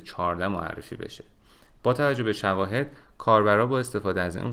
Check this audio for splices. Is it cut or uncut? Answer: uncut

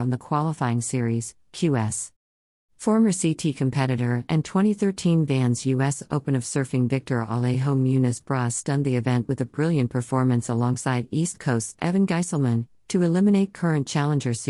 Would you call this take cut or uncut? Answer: cut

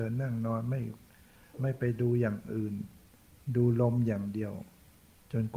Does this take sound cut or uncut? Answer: uncut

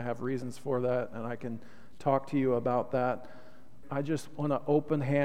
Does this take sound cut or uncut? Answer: cut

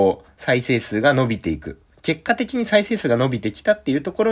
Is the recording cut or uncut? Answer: uncut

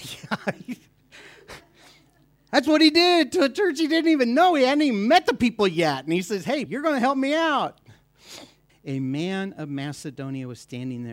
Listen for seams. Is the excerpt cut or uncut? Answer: cut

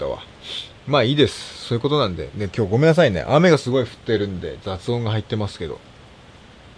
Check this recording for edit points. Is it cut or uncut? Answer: uncut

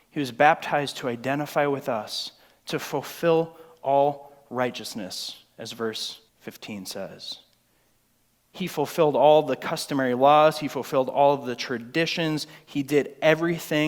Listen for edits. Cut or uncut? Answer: cut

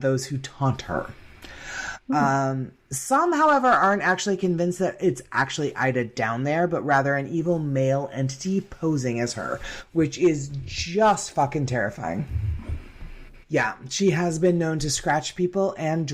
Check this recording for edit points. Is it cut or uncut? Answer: cut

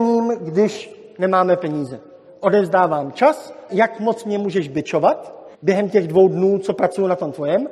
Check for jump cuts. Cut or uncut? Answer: cut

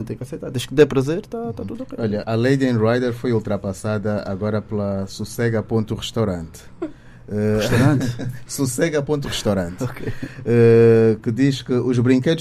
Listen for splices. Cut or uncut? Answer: cut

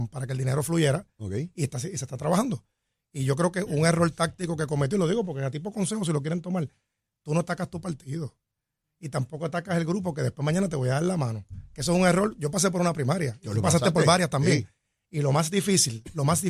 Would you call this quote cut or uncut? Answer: uncut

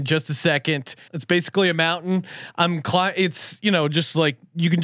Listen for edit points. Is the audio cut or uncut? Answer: cut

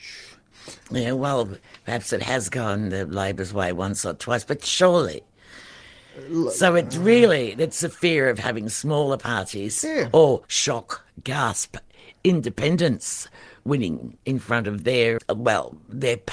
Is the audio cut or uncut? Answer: cut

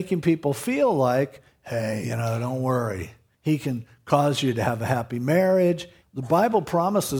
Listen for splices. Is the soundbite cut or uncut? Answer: cut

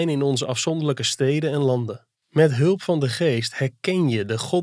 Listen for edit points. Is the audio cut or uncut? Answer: cut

